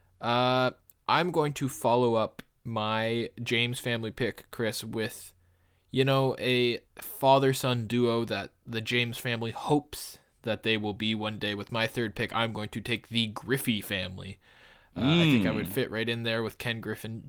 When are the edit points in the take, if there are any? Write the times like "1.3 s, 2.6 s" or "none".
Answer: 6.9 s